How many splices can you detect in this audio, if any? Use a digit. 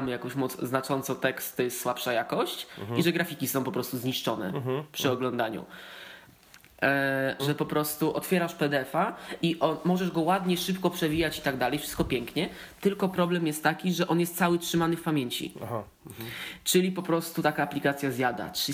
1